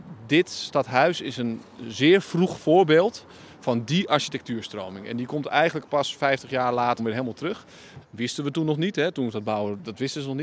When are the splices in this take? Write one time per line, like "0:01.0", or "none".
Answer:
0:07.0
0:08.0